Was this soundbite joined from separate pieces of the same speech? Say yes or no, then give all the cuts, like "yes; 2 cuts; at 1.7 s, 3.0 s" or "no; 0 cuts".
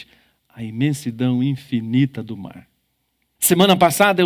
yes; 1 cut; at 3.4 s